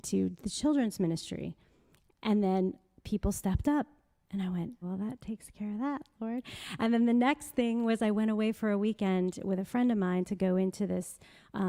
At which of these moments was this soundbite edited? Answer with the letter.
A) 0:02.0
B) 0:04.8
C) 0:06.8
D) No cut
B